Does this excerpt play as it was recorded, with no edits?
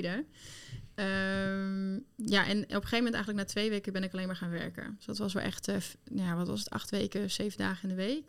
yes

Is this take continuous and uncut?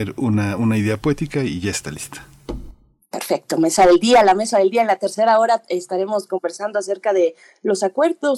yes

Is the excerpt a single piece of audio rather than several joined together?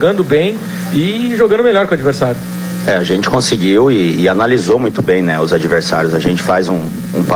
yes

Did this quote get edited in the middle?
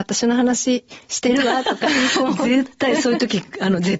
no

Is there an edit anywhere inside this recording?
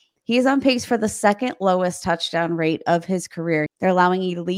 yes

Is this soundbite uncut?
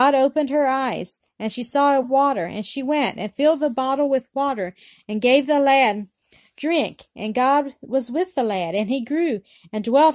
no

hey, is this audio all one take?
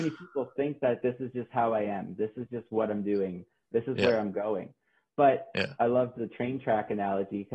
no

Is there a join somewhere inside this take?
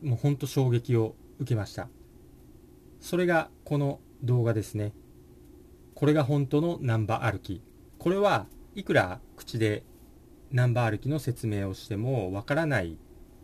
yes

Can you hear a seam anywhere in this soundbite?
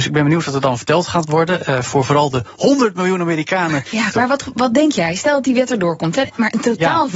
yes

